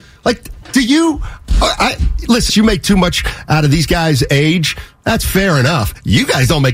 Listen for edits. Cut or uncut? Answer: cut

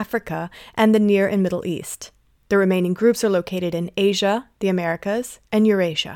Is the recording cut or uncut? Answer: uncut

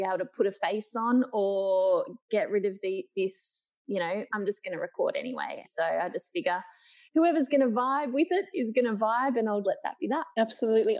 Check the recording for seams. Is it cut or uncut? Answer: cut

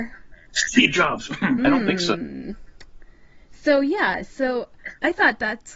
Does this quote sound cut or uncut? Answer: cut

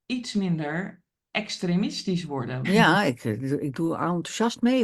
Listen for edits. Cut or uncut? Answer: cut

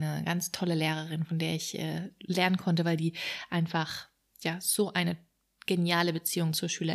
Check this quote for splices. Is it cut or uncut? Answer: uncut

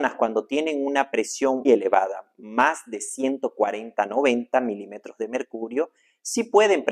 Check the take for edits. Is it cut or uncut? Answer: cut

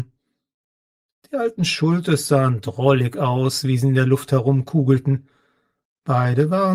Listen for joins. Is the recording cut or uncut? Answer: uncut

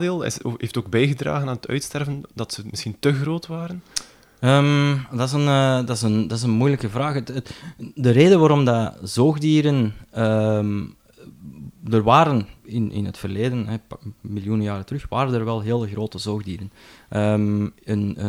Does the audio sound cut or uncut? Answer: uncut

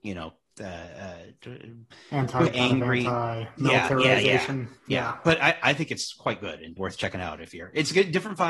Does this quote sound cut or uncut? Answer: cut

